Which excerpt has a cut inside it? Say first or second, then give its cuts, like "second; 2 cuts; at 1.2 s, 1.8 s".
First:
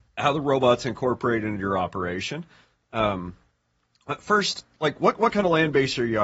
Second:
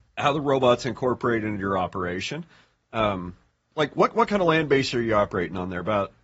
second; 1 cut; at 3.7 s